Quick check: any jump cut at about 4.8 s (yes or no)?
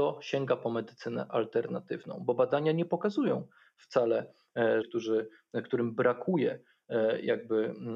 yes